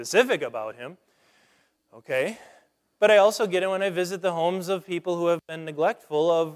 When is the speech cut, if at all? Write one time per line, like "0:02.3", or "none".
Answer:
none

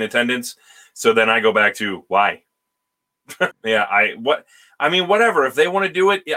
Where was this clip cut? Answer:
0:03.5

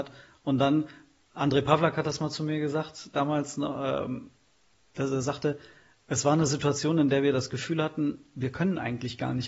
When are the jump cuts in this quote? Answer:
none

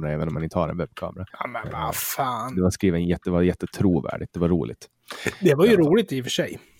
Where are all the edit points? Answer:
0:01.3
0:02.7

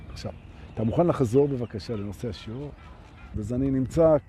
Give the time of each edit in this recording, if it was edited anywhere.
0:03.3

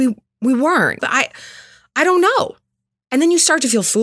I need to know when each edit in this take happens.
0:01.0

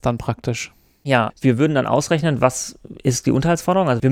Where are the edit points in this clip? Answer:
0:01.3

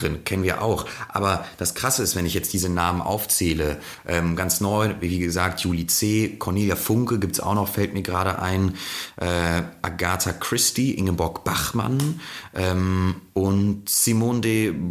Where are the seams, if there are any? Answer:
none

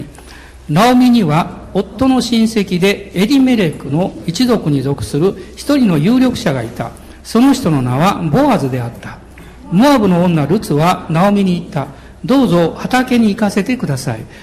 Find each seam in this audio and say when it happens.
none

